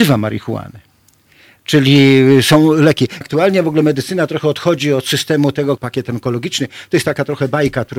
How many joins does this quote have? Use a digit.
2